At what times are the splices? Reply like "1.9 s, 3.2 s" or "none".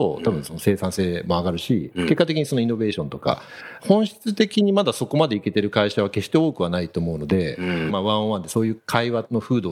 3.8 s, 7.9 s